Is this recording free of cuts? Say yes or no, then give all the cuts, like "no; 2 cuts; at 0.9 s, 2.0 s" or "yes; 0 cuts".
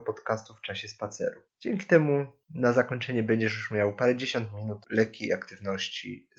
yes; 0 cuts